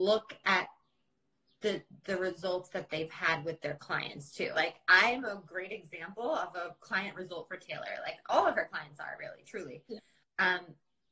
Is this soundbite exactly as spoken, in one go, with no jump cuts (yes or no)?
no